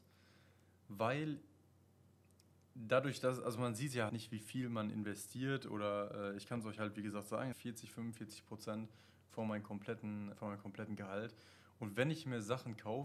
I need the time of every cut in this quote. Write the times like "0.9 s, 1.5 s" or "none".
4.1 s, 7.5 s, 10.3 s

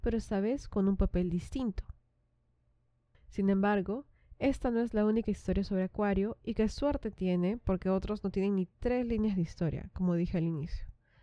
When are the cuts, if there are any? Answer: 3.1 s

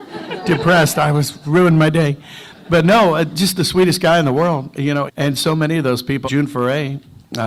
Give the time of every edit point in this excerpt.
5.1 s, 6.2 s

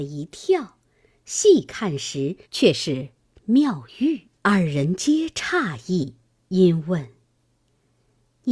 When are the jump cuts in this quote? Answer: 2.4 s, 4.4 s

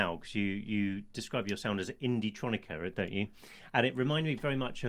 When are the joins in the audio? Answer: none

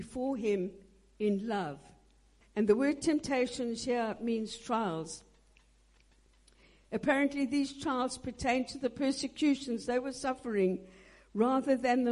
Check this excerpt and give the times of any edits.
2.4 s

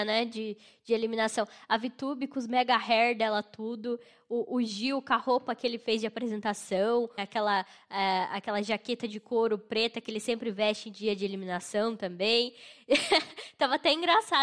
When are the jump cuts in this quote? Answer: 7.2 s

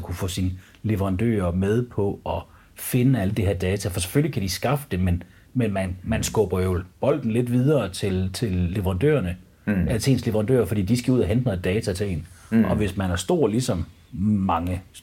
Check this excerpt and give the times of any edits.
none

